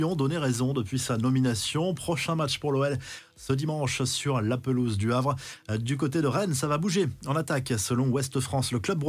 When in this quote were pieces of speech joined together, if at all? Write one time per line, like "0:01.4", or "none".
none